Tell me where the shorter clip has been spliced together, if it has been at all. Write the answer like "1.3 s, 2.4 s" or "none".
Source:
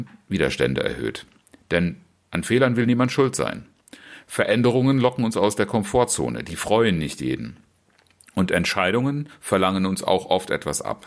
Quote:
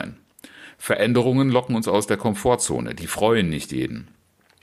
none